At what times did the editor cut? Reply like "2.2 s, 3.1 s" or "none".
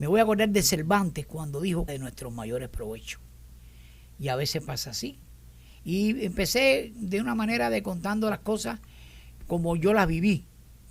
1.9 s, 9.4 s